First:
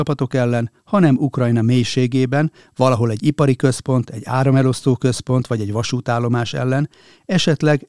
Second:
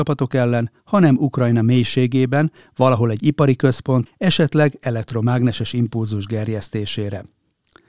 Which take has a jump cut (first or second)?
second